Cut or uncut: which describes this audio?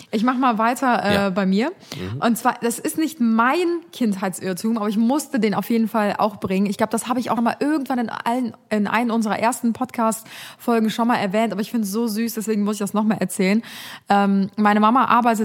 cut